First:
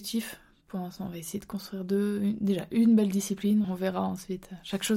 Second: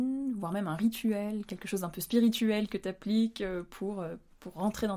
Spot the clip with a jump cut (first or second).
first